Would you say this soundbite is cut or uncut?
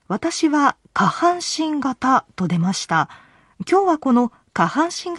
uncut